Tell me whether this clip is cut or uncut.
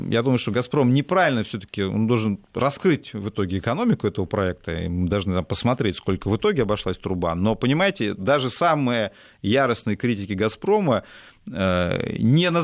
uncut